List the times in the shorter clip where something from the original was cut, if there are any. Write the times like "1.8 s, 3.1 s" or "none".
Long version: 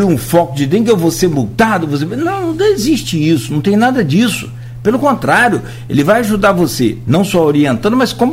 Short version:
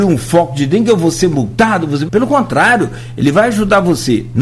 2.1 s